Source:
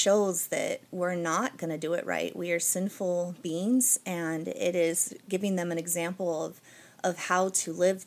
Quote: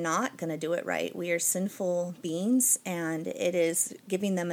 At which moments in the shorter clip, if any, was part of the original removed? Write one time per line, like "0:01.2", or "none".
none